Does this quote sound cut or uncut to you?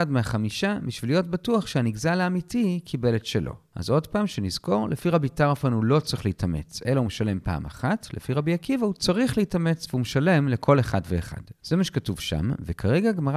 uncut